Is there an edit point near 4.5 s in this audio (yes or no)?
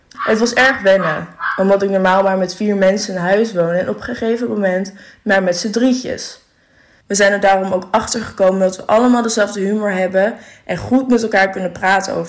no